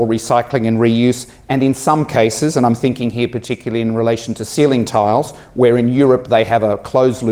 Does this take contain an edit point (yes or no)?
no